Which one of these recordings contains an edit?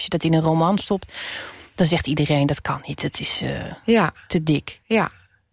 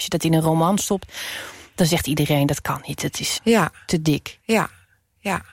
second; 1 cut; at 3.4 s

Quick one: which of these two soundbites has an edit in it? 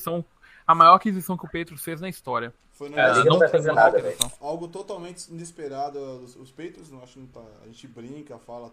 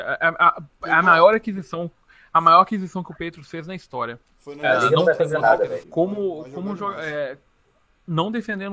second; 1 cut; at 5.8 s

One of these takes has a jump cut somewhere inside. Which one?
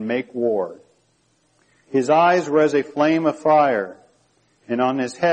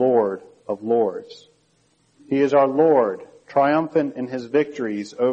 second; 1 cut; at 2.2 s

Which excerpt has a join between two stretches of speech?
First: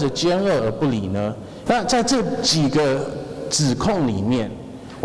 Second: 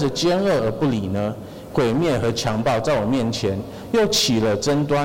first; 1 cut; at 1.7 s

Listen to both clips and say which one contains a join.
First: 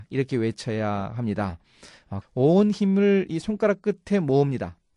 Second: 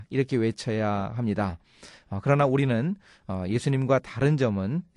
first; 1 cut; at 2.2 s

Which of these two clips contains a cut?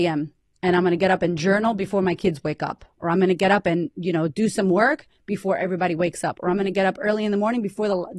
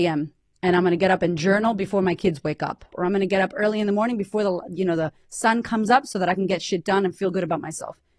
second; 1 cut; at 2.9 s

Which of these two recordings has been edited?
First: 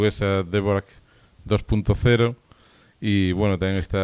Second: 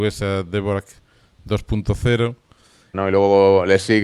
second; 1 cut; at 2.9 s

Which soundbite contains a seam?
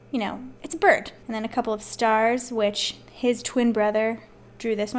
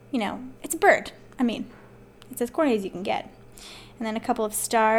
first; 1 cut; at 1.2 s

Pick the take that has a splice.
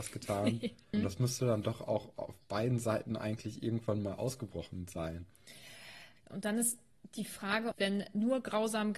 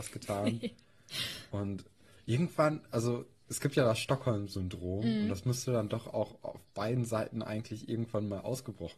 first; 3 cuts; at 0.9 s, 6.2 s, 7.7 s

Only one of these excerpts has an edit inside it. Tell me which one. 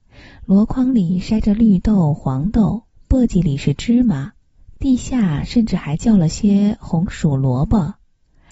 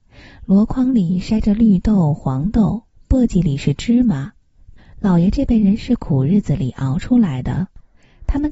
second; 1 cut; at 4.8 s

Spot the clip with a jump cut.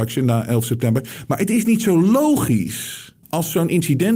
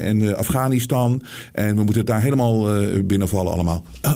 first; 1 cut; at 3.2 s

